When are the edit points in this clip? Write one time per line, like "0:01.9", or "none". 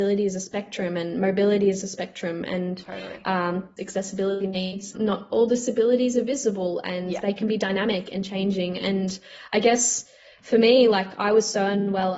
0:03.8
0:04.9